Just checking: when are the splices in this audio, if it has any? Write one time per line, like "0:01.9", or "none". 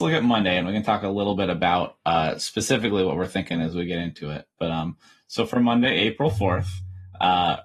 none